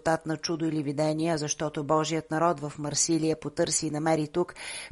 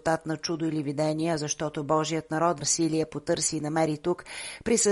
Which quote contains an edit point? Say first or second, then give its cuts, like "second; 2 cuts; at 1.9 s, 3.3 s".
second; 1 cut; at 2.6 s